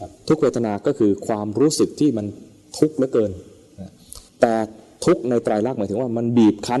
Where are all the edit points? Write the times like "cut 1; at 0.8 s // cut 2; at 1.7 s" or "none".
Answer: cut 1; at 4.3 s